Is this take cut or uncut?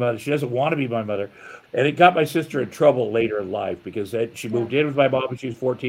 cut